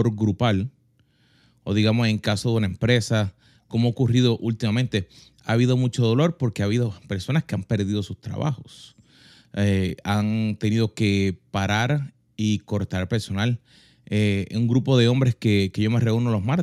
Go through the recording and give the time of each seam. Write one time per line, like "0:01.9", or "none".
none